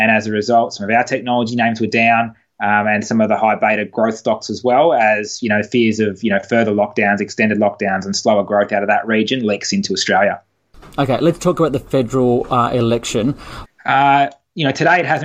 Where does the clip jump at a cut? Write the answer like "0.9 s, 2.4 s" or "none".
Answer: 13.6 s